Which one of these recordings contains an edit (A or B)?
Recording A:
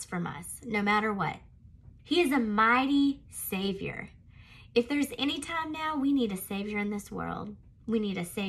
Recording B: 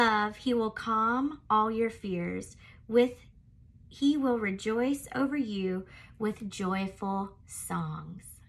A